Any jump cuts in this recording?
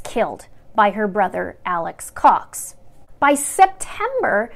no; 0 cuts

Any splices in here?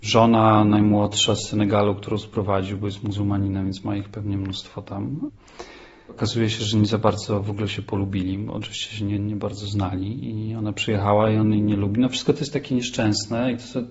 no; 0 cuts

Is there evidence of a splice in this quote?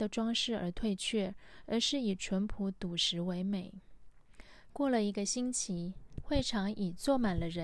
yes; 2 cuts; at 4.7 s, 6.2 s

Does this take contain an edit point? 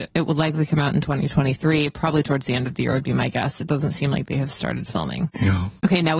no; 0 cuts

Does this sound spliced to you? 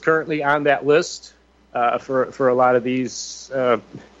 yes; 1 cut; at 1.5 s

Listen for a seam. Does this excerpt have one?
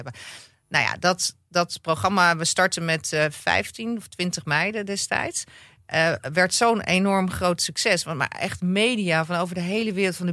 no; 0 cuts

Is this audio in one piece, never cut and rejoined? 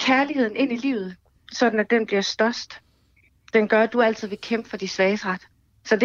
yes; 0 cuts

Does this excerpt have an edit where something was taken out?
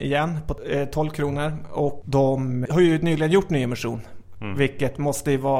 yes; 1 cut; at 2.7 s

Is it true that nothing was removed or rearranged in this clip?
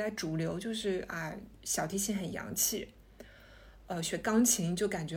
yes; 0 cuts

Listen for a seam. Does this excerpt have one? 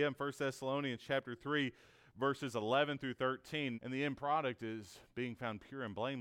yes; 1 cut; at 3.7 s

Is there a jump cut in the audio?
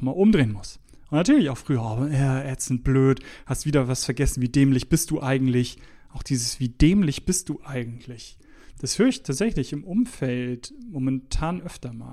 no; 0 cuts

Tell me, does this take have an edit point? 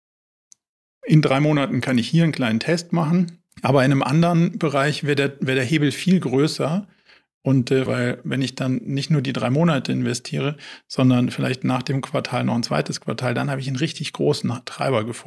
yes; 2 cuts; at 3.5 s, 7.9 s

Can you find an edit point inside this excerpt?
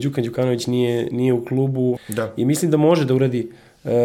yes; 1 cut; at 2.0 s

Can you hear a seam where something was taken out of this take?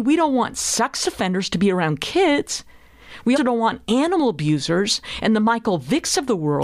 yes; 1 cut; at 3.4 s

